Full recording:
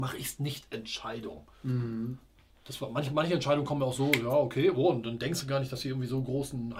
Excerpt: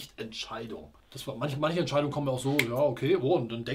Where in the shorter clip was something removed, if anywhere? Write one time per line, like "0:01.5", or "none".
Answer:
0:01.0